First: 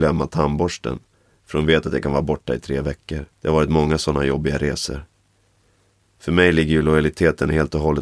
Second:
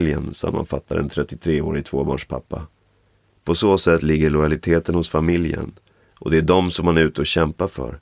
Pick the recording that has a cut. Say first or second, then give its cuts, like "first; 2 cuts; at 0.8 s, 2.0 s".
first; 1 cut; at 3.3 s